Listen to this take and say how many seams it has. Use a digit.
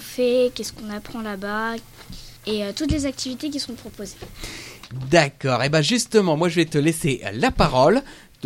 1